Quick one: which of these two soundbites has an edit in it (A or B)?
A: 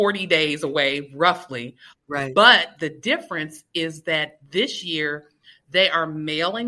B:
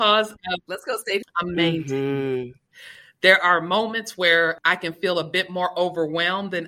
B